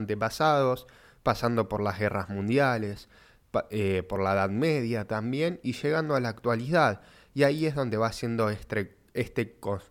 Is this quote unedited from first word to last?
yes; 0 cuts

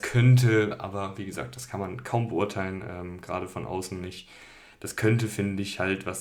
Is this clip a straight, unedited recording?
yes; 0 cuts

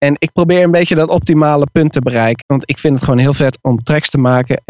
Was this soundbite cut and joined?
yes; 1 cut; at 2.4 s

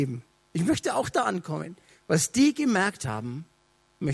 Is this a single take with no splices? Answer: yes; 0 cuts

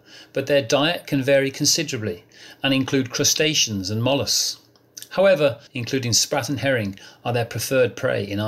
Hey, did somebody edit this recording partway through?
yes; 1 cut; at 5.7 s

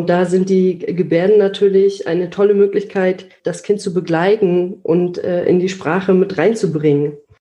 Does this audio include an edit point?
no; 0 cuts

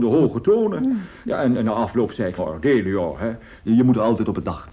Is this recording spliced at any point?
yes; 2 cuts; at 2.4 s, 3.6 s

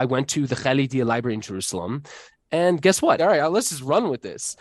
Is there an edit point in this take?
yes; 1 cut; at 3.2 s

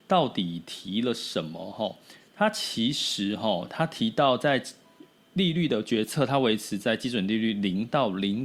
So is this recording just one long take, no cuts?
yes; 0 cuts

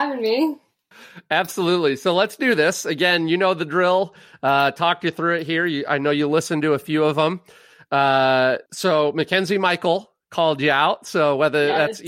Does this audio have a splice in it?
yes; 1 cut; at 8.7 s

